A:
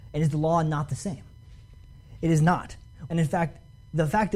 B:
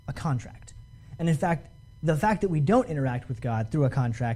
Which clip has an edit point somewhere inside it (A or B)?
A